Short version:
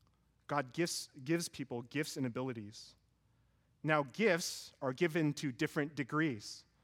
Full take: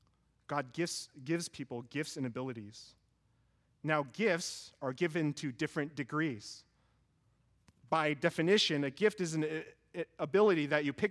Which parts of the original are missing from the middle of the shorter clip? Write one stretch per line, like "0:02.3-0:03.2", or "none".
none